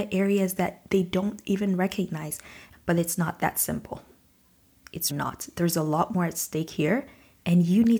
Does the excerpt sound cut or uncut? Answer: cut